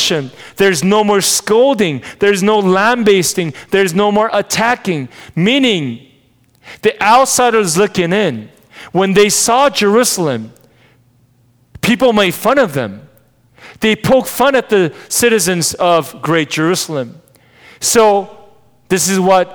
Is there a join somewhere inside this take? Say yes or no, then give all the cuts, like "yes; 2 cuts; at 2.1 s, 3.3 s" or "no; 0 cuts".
no; 0 cuts